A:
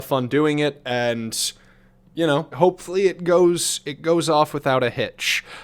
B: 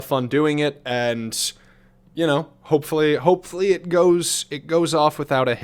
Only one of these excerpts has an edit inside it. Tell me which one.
A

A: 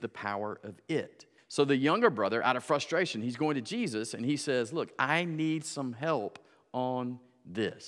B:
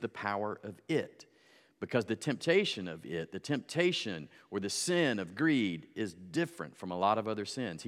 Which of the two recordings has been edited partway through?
A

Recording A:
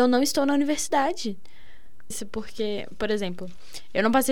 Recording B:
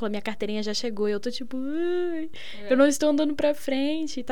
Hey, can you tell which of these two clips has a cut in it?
A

